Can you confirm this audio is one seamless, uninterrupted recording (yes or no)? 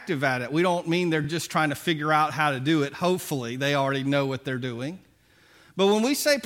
yes